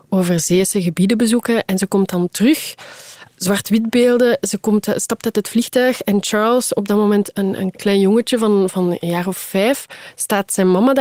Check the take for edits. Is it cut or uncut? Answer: uncut